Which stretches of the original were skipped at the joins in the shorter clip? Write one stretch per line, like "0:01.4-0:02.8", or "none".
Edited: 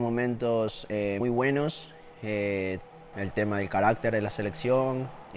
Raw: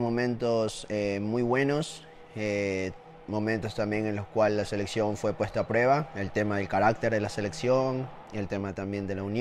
0:01.2-0:01.3
0:03.3-0:06.1